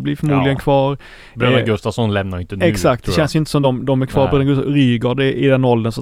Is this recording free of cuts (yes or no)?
yes